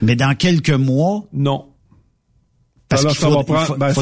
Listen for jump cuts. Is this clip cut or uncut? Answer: uncut